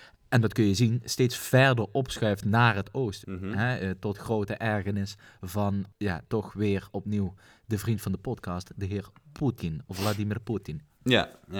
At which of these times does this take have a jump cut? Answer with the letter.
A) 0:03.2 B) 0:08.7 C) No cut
A